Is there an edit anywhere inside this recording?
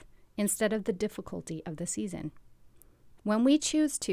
yes; 1 cut; at 3.2 s

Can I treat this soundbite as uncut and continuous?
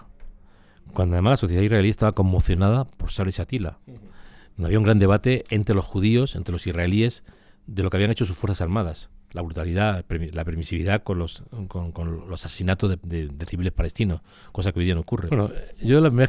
no; 2 cuts; at 13.0 s, 15.3 s

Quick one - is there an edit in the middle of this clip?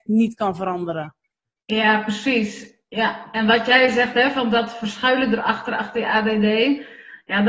no; 0 cuts

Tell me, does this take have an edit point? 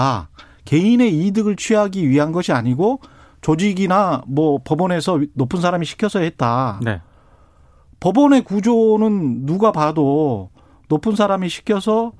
no; 0 cuts

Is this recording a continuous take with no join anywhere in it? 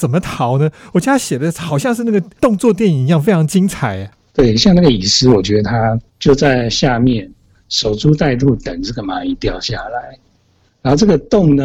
yes; 0 cuts

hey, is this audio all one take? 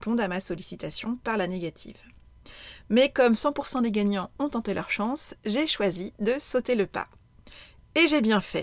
yes; 0 cuts

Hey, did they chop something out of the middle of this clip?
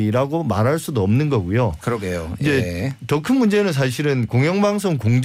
no; 0 cuts

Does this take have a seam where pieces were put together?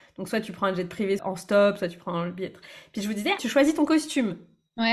yes; 2 cuts; at 1.2 s, 3.4 s

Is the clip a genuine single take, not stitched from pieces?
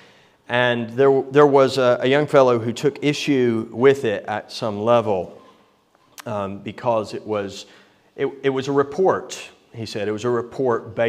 yes; 0 cuts

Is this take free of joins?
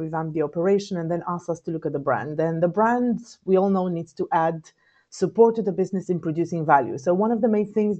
yes; 0 cuts

